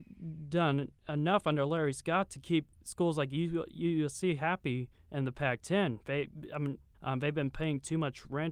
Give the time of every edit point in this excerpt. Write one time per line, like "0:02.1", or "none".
0:06.9